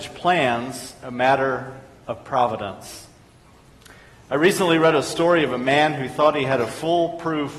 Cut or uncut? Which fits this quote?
uncut